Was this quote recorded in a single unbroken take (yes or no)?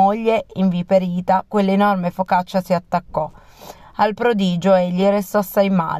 yes